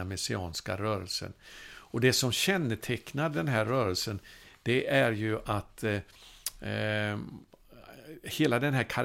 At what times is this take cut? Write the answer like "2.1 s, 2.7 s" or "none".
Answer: none